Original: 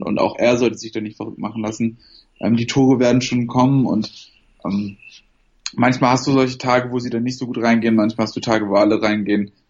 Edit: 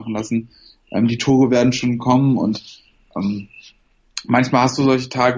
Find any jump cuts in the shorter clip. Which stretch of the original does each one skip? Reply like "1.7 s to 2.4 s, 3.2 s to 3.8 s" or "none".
none